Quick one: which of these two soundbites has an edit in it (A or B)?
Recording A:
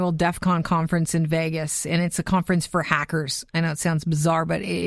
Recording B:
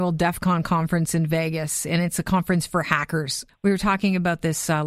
B